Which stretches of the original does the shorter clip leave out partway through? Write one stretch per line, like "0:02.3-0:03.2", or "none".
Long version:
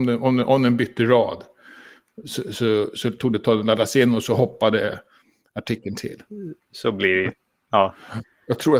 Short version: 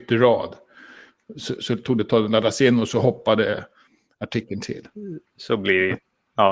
0:02.4-0:02.9